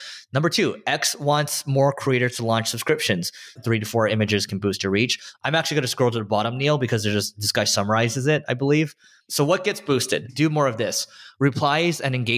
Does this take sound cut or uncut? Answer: cut